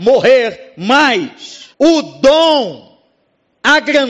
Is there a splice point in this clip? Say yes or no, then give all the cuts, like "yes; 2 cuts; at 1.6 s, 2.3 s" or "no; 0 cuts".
yes; 1 cut; at 1.7 s